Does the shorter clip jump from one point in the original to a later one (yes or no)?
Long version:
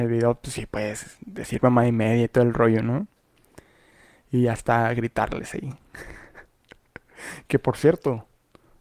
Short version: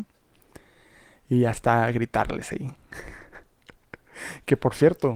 no